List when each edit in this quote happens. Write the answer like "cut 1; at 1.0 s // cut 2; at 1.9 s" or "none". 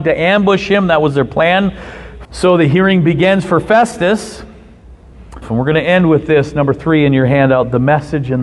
cut 1; at 2.3 s // cut 2; at 5.4 s